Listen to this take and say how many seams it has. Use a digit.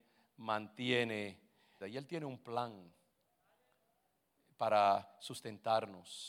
1